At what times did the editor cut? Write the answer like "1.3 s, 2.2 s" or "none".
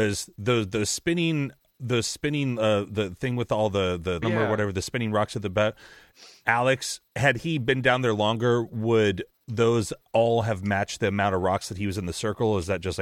4.2 s, 7.0 s